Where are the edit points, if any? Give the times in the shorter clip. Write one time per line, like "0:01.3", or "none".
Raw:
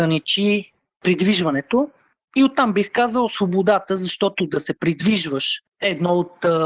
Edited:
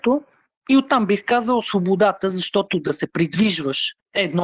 none